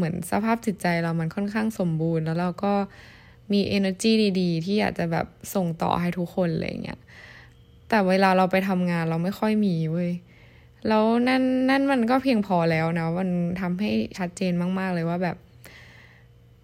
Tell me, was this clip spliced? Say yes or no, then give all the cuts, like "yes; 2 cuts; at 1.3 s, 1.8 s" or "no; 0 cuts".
yes; 1 cut; at 14.1 s